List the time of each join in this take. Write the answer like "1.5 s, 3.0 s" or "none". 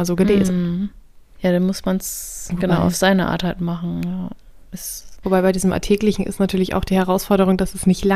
5.2 s